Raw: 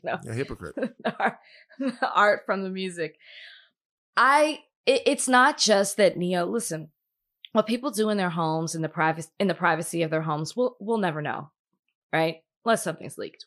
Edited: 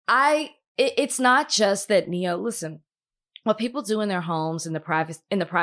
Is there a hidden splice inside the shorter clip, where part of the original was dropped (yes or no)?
no